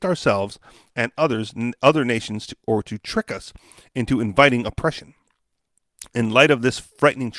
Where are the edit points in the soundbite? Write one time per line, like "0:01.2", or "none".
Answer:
none